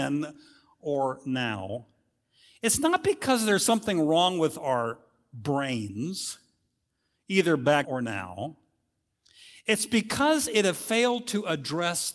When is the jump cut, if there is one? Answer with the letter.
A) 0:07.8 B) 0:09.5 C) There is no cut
A